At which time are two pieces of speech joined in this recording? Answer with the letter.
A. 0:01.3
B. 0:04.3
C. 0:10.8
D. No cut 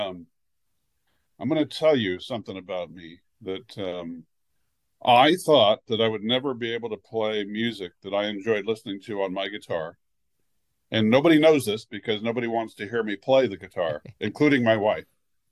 D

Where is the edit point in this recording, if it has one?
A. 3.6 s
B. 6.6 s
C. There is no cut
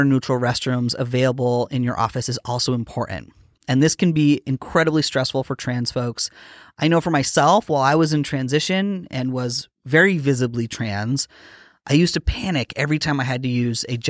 A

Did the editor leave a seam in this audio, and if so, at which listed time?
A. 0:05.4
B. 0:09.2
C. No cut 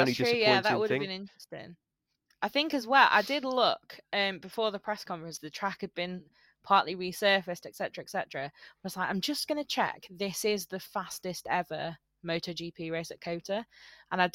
A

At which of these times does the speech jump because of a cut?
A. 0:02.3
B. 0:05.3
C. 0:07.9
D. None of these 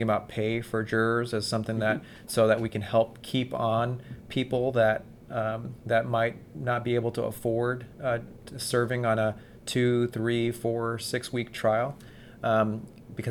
A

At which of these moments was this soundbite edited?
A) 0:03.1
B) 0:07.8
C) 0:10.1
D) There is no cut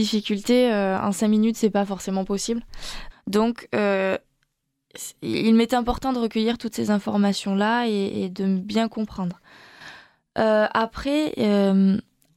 A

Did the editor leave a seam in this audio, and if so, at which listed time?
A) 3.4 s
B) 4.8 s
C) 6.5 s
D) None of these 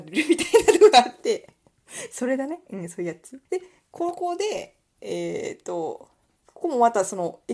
A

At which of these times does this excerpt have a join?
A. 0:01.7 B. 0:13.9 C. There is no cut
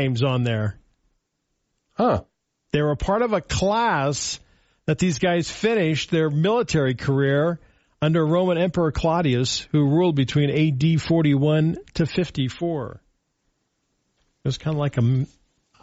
C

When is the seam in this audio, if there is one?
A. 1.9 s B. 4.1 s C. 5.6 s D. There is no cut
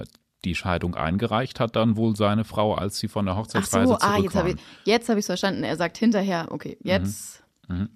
D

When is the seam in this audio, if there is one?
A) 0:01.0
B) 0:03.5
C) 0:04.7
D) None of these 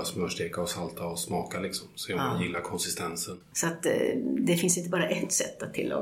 B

